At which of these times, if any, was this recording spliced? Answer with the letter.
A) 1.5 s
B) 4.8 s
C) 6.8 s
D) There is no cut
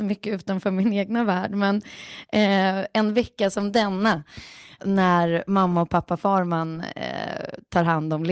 B